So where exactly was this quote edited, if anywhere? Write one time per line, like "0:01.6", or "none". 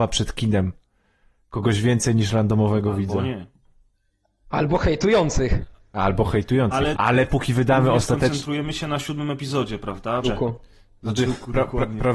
0:06.9
0:10.2